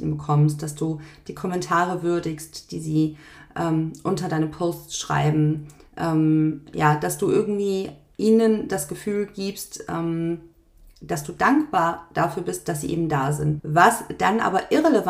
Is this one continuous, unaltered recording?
no; 1 cut; at 13.6 s

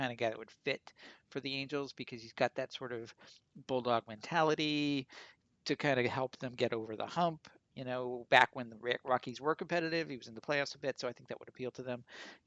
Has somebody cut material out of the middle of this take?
no; 0 cuts

